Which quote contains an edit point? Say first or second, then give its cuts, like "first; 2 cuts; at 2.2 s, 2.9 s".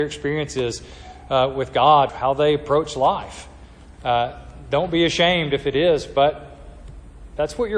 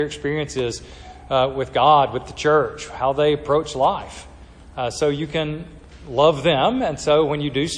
first; 2 cuts; at 2.1 s, 3.9 s